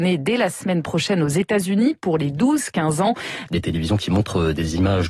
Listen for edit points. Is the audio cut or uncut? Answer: cut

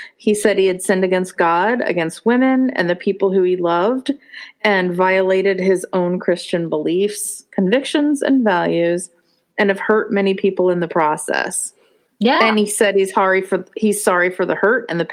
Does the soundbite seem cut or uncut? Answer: uncut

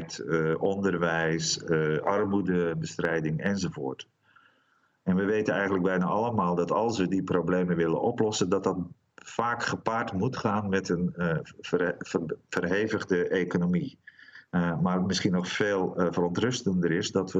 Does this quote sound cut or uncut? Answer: cut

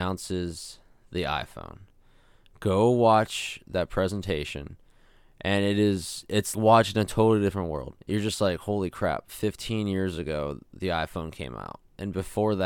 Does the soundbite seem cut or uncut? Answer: cut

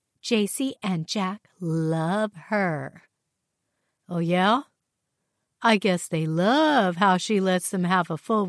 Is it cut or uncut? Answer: uncut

